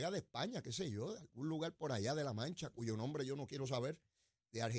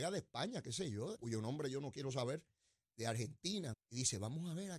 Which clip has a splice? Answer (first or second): second